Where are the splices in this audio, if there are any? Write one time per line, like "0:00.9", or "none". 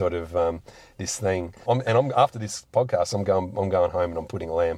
0:01.7